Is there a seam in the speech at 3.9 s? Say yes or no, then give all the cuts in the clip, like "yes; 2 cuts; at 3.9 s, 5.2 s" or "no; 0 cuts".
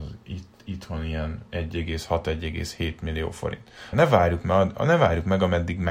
yes; 1 cut; at 3.9 s